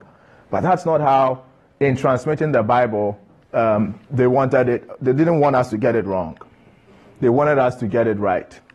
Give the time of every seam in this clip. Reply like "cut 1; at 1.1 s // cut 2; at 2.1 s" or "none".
none